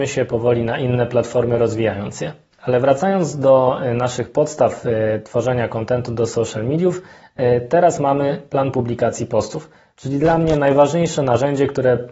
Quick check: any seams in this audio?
yes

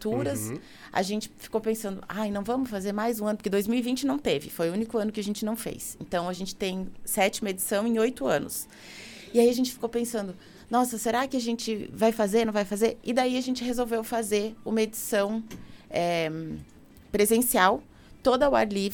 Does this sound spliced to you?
no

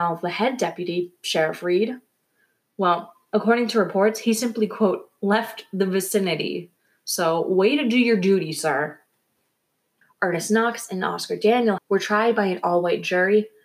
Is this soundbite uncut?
no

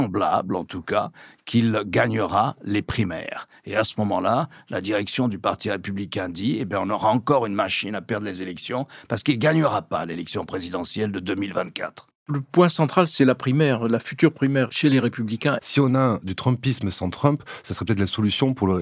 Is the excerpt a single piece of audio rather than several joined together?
no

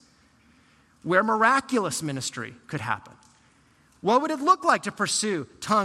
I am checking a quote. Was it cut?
no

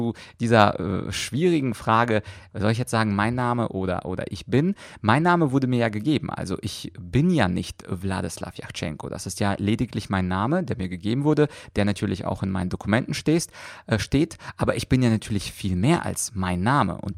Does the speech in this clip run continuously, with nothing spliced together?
yes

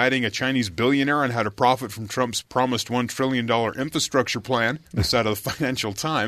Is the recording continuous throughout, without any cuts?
no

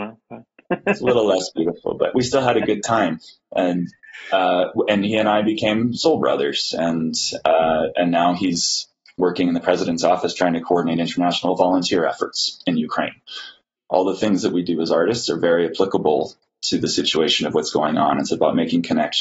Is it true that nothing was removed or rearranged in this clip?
no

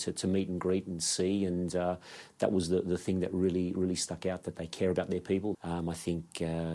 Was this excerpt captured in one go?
no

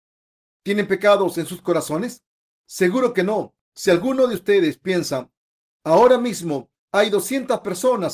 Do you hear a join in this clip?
no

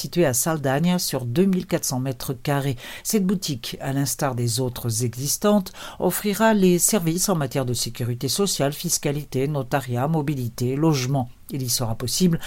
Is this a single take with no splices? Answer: yes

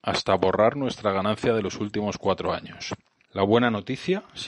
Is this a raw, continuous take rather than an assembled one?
no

